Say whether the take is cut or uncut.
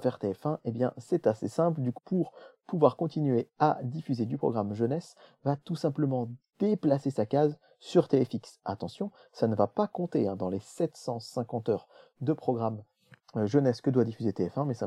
cut